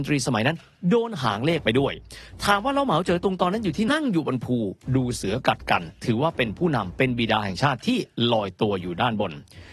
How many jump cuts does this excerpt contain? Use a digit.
1